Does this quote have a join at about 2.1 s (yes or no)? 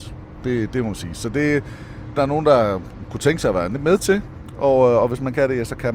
yes